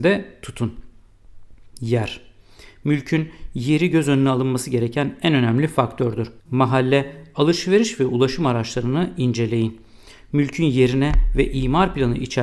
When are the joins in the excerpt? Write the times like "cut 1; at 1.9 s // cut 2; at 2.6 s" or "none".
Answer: cut 1; at 6.4 s